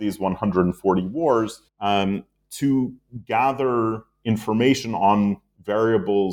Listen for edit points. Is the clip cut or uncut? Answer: cut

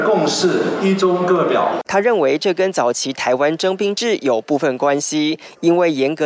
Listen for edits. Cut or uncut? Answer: cut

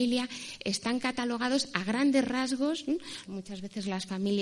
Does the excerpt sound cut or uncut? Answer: cut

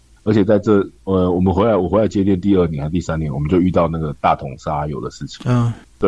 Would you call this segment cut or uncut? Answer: uncut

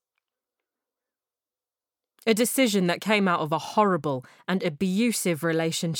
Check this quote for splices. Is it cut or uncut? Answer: uncut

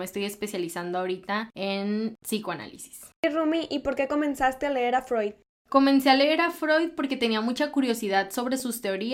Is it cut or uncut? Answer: uncut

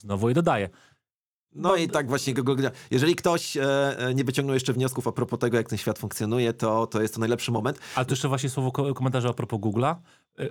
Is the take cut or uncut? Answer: uncut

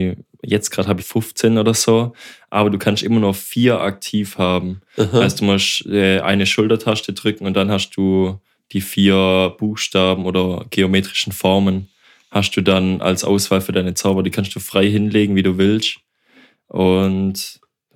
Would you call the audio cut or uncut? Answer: cut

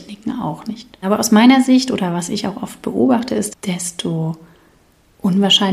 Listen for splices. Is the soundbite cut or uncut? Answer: cut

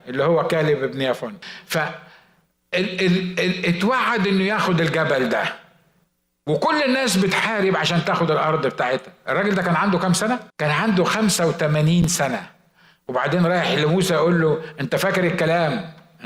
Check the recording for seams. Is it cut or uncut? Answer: cut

